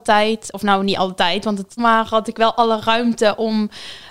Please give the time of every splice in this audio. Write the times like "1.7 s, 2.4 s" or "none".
1.8 s